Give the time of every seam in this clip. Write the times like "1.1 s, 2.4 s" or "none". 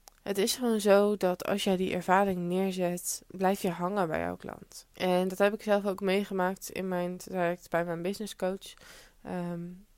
4.9 s